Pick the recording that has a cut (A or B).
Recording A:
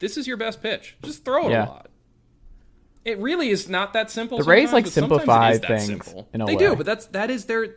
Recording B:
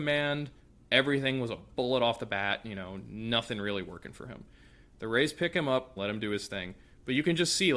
B